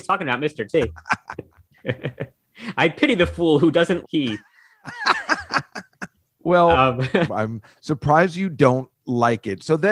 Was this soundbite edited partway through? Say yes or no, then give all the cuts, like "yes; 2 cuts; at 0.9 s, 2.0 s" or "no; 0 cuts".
yes; 2 cuts; at 4.0 s, 7.3 s